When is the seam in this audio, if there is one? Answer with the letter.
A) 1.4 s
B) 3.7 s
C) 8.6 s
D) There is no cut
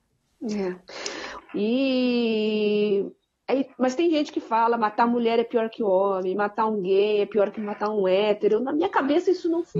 A